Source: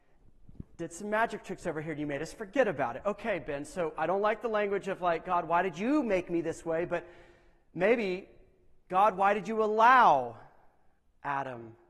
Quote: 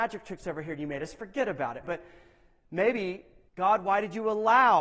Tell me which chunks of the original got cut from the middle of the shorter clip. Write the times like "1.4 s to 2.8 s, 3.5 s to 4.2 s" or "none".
3.0 s to 6.9 s, 8.5 s to 8.8 s